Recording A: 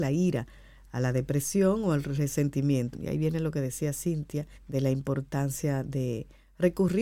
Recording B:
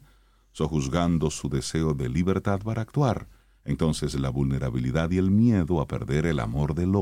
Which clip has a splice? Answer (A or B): A